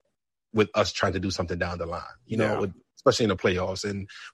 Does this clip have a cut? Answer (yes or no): no